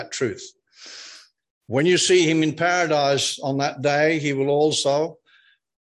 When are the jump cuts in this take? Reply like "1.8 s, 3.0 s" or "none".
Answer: none